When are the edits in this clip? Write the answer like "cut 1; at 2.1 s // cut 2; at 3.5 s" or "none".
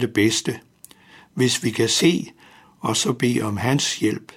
cut 1; at 2.6 s